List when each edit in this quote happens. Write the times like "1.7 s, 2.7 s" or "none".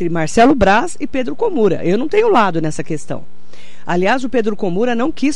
none